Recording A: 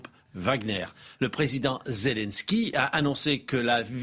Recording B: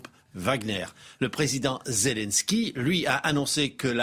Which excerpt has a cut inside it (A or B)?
A